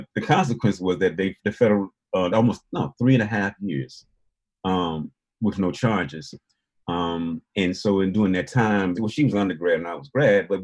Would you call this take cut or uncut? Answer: cut